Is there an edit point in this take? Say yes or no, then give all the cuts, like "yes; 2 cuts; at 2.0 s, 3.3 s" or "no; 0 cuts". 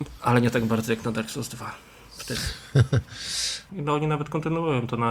yes; 1 cut; at 3.7 s